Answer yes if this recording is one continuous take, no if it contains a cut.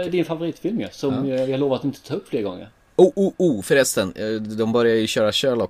yes